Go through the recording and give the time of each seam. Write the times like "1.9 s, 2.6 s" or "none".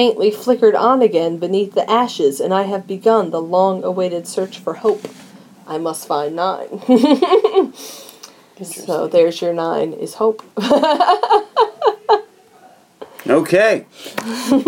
none